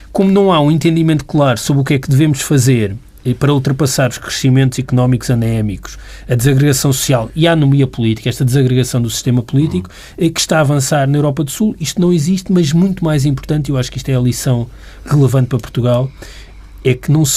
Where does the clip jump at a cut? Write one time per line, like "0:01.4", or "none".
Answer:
none